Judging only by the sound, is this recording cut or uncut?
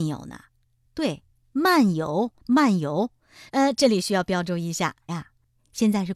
cut